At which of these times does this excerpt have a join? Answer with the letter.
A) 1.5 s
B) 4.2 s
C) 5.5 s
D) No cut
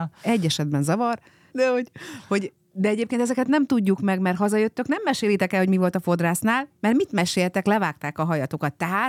A